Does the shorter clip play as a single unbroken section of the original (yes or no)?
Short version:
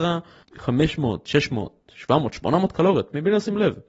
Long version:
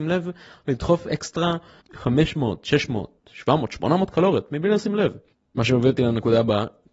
yes